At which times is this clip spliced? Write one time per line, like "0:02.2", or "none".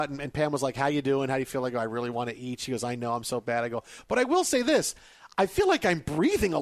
none